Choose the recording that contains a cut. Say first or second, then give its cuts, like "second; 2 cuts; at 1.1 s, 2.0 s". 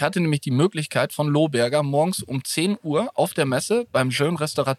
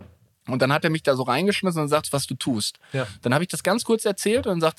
second; 1 cut; at 2.0 s